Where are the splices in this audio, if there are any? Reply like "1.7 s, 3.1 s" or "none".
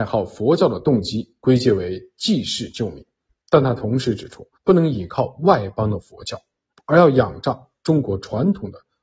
4.5 s